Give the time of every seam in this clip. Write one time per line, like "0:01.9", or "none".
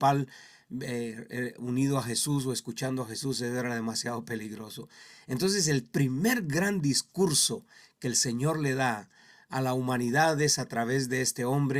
none